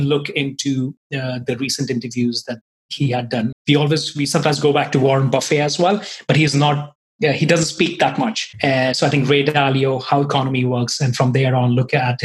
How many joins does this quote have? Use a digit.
1